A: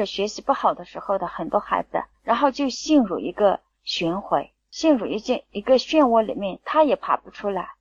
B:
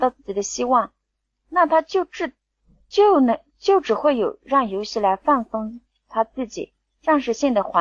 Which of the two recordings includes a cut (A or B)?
A